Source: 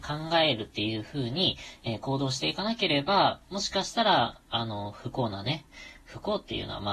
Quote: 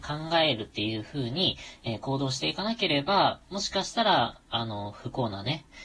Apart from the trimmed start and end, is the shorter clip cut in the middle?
no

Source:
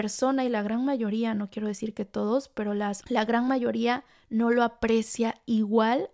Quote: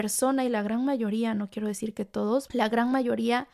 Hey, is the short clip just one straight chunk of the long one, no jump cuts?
no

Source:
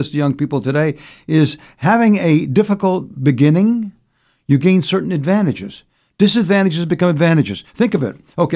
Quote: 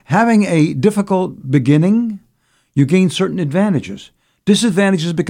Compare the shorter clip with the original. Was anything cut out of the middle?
no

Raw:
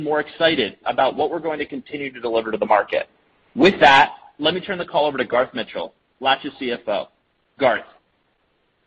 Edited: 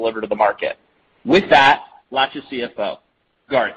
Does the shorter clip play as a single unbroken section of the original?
no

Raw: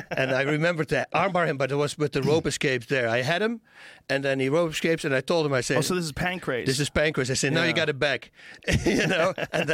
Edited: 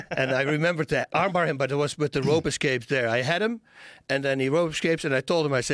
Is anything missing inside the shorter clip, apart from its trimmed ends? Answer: no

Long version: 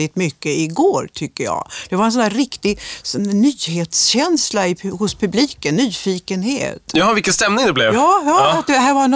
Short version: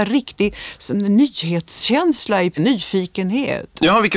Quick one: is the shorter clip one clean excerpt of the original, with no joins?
no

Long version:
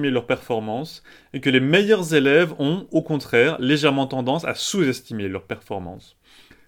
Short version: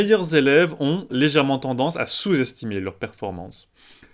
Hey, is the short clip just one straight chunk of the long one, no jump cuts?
no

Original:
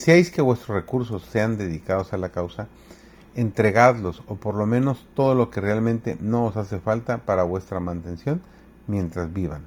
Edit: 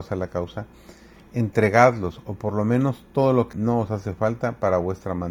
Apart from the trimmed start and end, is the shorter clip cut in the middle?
yes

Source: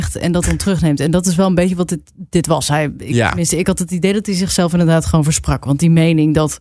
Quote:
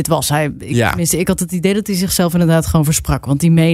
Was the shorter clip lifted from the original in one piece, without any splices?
yes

